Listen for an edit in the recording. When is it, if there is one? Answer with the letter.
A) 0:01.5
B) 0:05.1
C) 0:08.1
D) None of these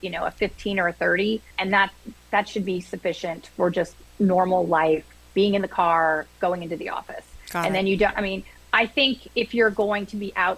A